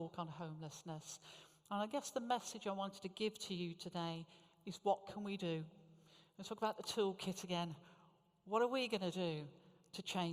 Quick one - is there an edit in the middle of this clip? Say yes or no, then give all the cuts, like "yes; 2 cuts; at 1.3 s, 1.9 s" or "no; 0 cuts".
no; 0 cuts